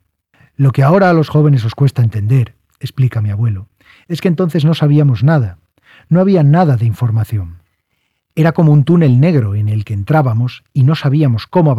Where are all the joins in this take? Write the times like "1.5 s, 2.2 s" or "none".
none